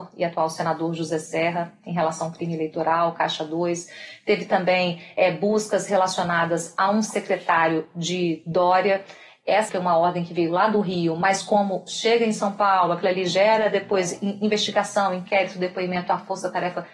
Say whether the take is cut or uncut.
cut